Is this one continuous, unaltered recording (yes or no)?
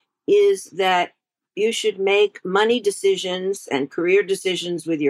yes